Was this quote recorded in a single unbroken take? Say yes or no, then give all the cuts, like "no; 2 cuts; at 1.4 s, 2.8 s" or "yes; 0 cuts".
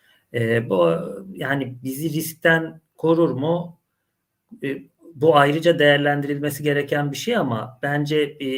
yes; 0 cuts